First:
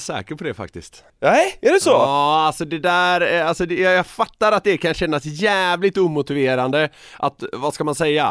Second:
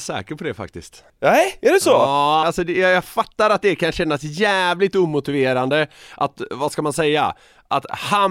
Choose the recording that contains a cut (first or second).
second